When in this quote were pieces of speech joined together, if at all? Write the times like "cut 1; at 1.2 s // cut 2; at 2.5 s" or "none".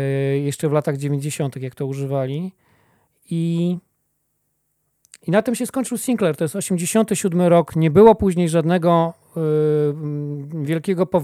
none